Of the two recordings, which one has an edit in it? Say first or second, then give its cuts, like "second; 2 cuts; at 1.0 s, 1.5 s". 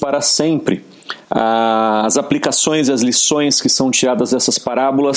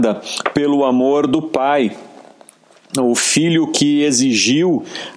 first; 1 cut; at 1.2 s